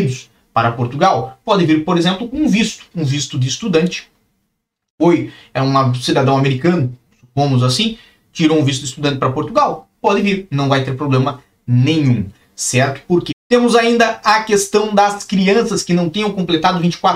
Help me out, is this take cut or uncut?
cut